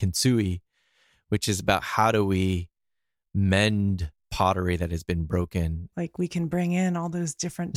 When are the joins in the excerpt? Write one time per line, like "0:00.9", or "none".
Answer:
0:05.9